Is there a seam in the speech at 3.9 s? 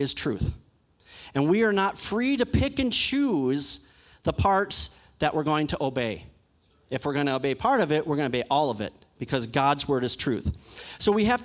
no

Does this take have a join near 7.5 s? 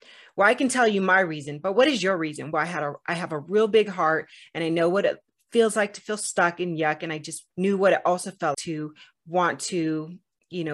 yes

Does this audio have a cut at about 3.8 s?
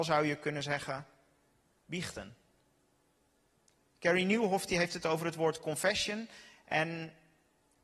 no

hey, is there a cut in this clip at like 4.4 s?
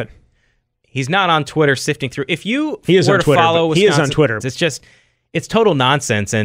yes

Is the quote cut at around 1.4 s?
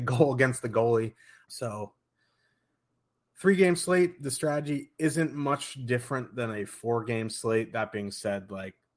yes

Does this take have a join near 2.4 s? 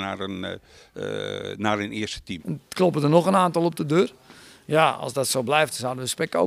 yes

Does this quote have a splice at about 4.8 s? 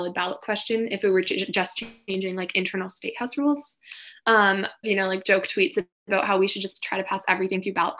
yes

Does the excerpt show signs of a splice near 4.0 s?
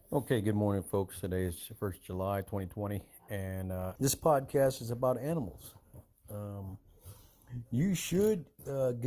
yes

